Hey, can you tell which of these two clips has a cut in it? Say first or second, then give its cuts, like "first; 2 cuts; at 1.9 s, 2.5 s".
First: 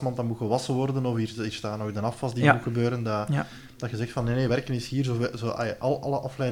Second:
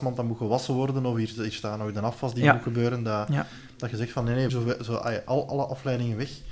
second; 1 cut; at 4.5 s